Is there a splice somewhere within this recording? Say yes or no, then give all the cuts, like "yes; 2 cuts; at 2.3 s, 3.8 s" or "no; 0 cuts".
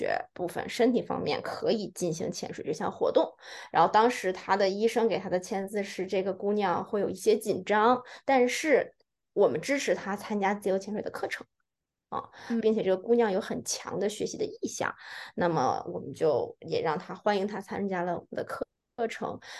yes; 1 cut; at 12.6 s